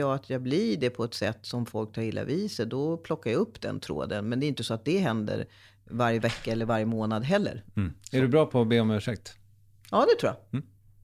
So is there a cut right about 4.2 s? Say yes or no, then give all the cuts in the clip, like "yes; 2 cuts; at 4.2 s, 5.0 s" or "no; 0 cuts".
no; 0 cuts